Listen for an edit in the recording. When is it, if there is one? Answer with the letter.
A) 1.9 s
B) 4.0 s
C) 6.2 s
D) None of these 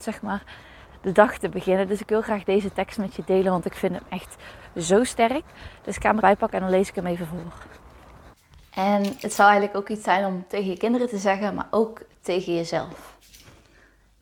C